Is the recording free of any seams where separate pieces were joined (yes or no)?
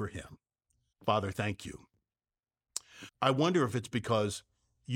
no